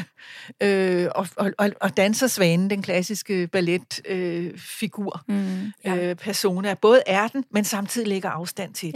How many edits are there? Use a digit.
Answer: 0